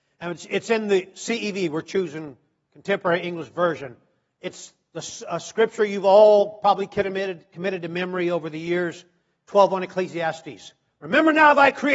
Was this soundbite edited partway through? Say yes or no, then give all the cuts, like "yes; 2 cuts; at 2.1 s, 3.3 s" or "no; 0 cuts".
no; 0 cuts